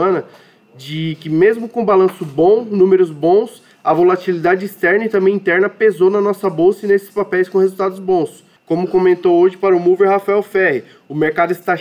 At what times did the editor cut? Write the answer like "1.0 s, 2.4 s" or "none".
8.6 s